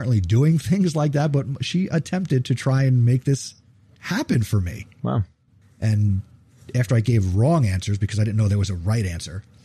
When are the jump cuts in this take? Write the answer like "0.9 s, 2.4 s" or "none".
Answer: 5.6 s